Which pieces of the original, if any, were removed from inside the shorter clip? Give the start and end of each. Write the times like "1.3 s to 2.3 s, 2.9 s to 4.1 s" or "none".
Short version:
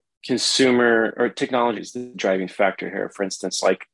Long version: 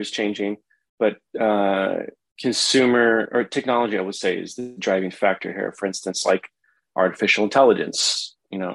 3.9 s to 4.4 s